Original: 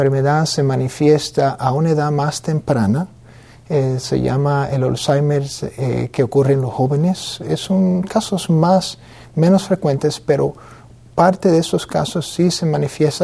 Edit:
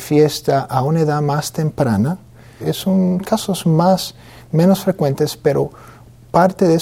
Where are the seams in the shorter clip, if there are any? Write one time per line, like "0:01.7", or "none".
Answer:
0:02.6